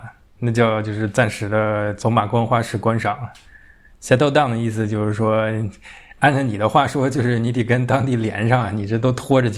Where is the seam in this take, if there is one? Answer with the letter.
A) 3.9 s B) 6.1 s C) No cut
C